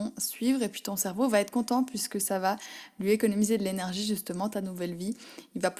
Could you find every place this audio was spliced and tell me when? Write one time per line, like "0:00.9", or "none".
none